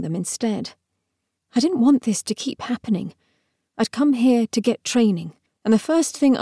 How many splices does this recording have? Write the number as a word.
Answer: one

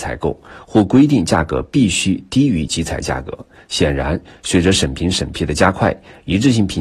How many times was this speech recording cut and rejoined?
zero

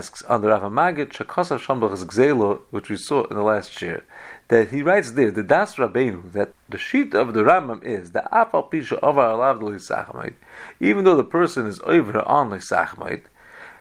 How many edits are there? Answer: one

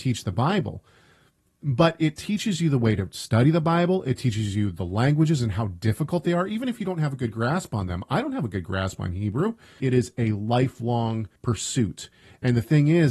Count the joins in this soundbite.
two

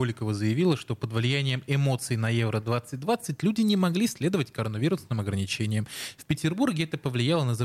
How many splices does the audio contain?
zero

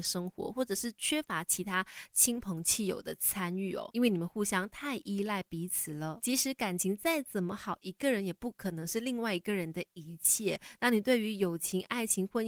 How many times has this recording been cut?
zero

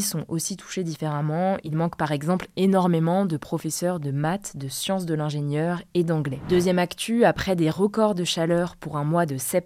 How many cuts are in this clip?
zero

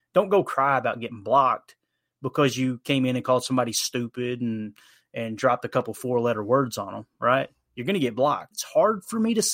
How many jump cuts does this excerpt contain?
one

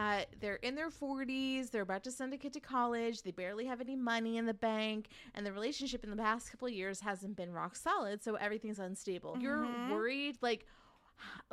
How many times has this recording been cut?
one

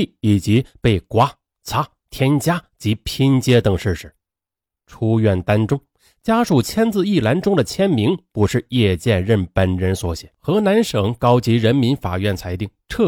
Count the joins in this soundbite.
two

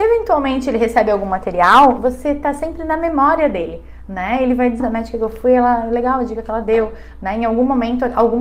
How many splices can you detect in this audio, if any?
one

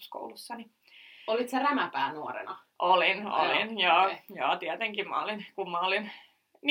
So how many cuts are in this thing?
zero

